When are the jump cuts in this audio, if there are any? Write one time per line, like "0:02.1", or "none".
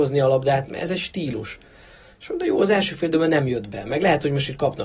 none